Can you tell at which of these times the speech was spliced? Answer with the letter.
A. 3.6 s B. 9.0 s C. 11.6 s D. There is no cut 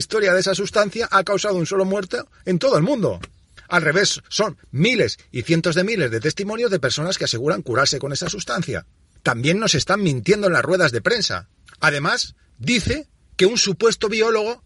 D